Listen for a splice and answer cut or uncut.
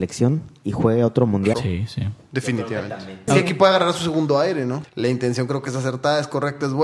cut